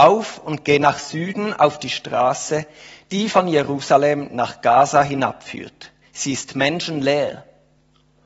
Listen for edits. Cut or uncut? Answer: uncut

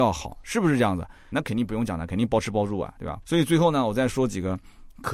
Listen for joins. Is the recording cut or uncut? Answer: cut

